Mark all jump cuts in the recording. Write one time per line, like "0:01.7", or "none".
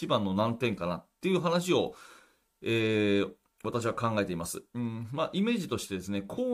none